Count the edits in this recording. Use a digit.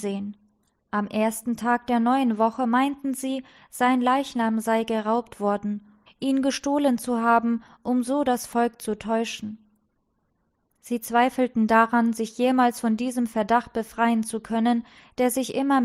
1